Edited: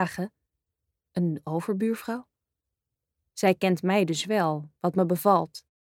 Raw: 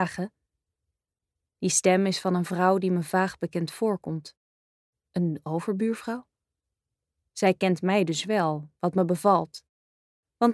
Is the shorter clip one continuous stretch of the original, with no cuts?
no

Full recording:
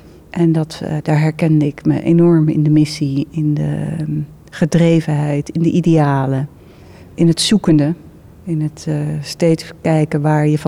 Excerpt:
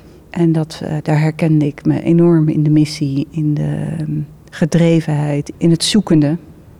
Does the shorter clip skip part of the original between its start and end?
yes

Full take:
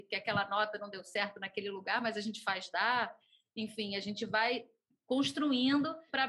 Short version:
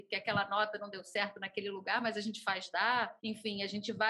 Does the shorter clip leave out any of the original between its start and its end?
yes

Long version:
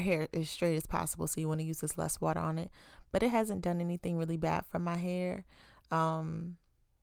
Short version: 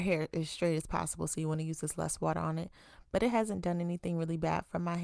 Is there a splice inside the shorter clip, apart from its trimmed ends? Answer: no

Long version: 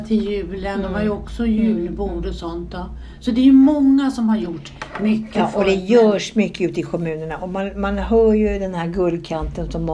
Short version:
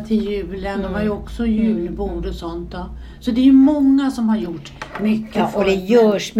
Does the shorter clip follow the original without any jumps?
yes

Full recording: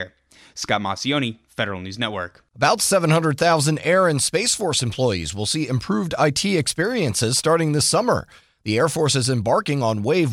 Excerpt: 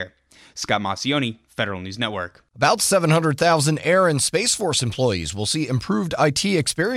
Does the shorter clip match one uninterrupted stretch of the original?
yes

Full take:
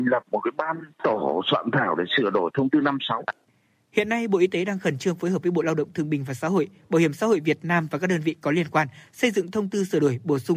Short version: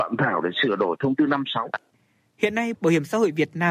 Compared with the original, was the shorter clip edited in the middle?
yes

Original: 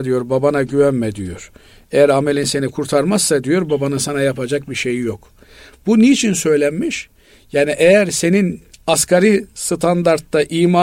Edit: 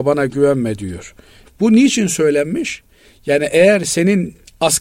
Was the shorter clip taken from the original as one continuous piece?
no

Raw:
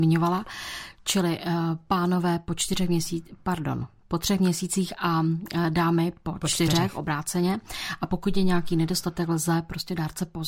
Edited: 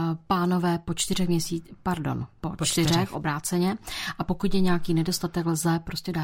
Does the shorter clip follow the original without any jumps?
no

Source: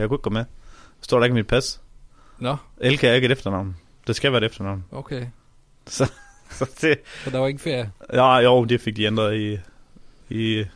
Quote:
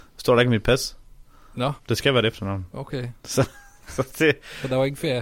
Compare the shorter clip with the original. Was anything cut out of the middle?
yes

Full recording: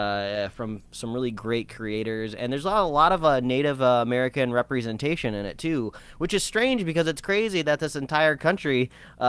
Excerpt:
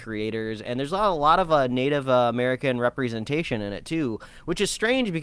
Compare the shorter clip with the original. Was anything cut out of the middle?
no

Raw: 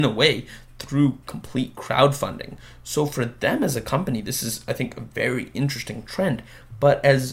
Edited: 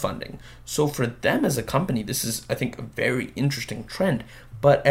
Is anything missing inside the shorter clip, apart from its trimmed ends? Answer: no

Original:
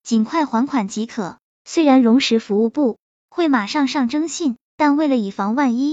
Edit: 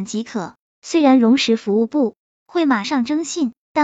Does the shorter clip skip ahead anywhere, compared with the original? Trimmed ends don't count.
yes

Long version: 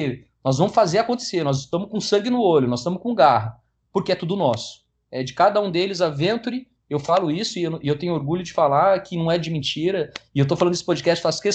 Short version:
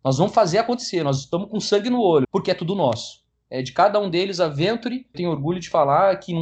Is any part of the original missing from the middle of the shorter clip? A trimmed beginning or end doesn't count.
yes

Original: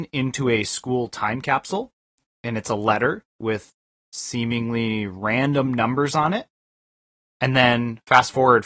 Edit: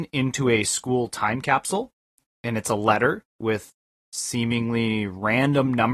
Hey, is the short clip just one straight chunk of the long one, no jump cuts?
yes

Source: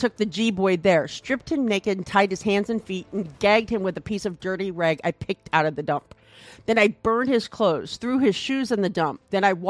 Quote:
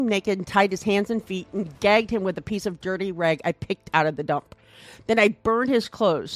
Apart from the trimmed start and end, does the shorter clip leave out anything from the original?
no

